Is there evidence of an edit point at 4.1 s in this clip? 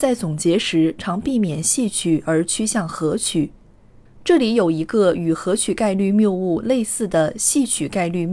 yes; 2 cuts; at 1.0 s, 4.1 s

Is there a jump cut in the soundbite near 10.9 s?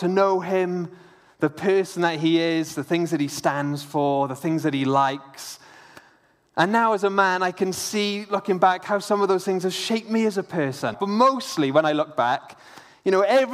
yes; 1 cut; at 10.9 s

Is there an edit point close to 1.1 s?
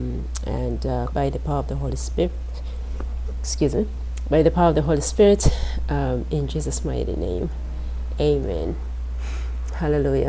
yes; 1 cut; at 1.1 s

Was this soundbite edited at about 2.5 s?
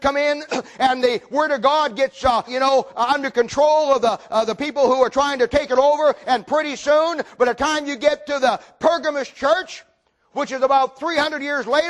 yes; 1 cut; at 2.5 s

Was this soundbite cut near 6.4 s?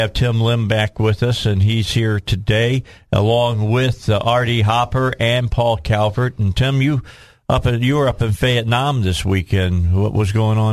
no; 0 cuts

